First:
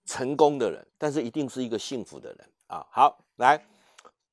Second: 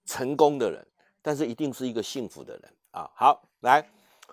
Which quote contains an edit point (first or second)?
first